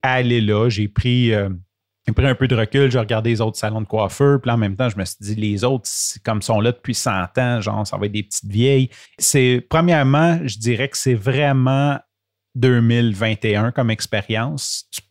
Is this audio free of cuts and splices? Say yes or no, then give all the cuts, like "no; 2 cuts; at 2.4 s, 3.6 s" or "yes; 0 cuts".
no; 1 cut; at 9.1 s